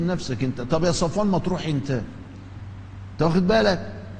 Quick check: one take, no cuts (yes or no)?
yes